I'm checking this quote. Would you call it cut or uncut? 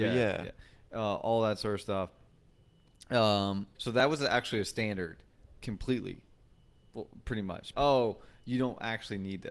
cut